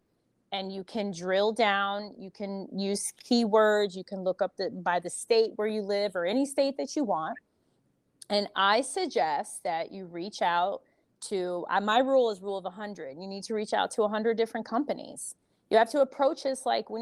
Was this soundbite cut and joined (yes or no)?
no